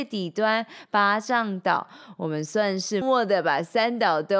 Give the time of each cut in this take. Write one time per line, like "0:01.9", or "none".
0:03.0